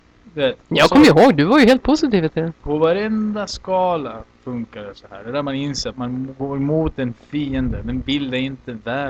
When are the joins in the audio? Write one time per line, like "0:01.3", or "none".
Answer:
0:05.9